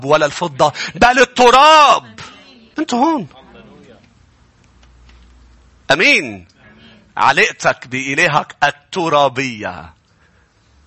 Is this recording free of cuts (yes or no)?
no